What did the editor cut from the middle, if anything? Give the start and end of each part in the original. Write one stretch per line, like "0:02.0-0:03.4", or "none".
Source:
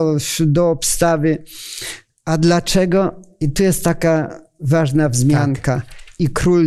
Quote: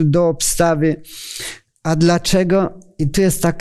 none